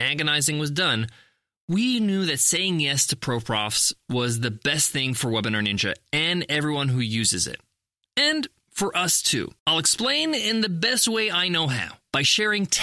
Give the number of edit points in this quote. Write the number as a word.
one